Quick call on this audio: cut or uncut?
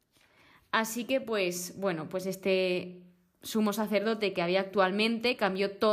uncut